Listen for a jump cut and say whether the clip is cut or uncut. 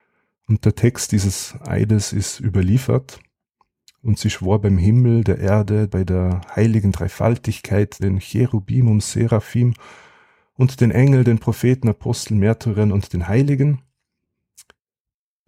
cut